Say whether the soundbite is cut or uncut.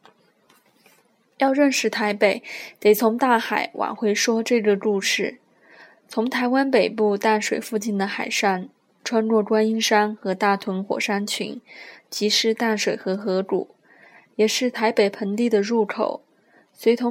uncut